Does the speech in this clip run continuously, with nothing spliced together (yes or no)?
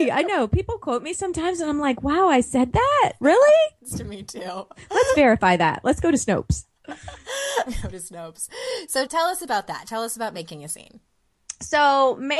no